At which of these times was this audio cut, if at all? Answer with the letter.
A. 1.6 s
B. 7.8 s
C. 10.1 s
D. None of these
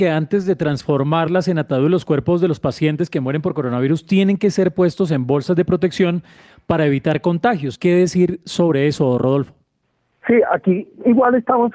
B